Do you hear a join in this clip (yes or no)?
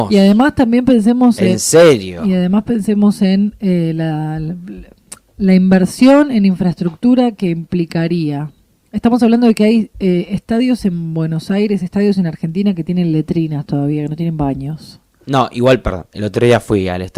no